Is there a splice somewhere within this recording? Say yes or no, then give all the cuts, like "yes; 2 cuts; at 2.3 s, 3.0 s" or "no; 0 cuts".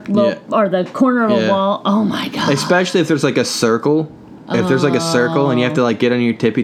no; 0 cuts